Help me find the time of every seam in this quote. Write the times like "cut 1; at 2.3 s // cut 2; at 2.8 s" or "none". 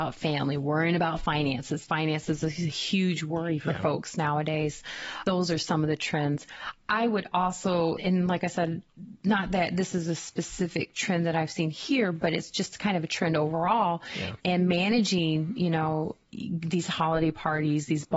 cut 1; at 8.0 s // cut 2; at 14.4 s